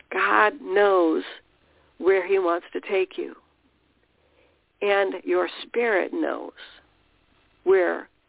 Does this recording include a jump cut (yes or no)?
no